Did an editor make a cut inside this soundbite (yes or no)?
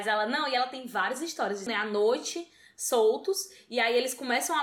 yes